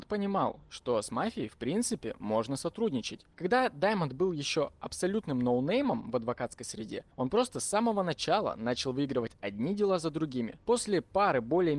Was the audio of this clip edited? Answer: no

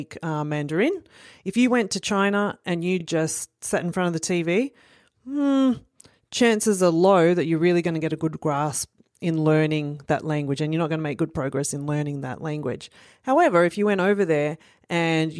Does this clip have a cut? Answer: no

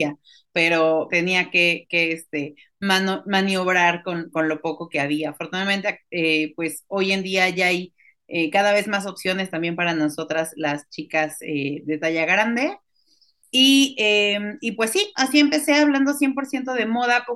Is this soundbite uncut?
no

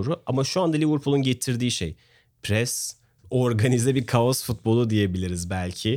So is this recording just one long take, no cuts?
no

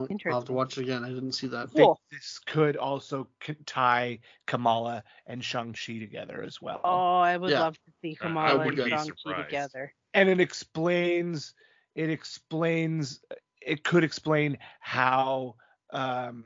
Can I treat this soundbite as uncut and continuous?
no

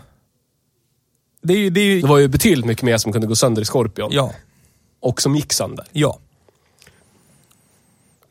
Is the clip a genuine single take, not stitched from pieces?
no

